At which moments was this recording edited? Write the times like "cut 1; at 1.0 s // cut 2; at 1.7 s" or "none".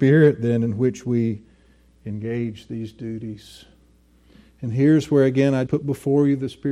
cut 1; at 5.7 s